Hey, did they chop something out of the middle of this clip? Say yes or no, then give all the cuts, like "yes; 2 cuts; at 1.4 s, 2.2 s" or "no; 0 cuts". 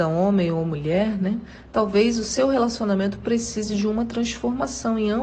no; 0 cuts